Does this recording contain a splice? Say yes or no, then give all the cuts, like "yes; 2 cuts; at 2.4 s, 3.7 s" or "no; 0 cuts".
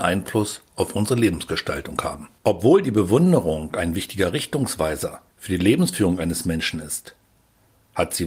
yes; 2 cuts; at 2.4 s, 5.3 s